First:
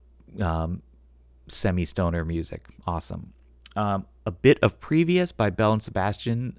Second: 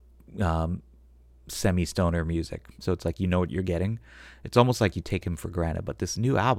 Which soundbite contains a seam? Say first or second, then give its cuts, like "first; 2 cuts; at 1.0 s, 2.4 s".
second; 1 cut; at 2.8 s